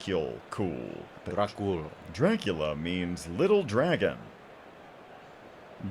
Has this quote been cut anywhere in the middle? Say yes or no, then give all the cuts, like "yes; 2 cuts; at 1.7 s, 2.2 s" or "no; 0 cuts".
yes; 1 cut; at 1.2 s